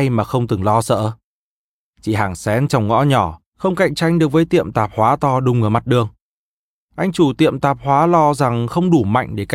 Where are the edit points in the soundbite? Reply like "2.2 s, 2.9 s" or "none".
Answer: 3.5 s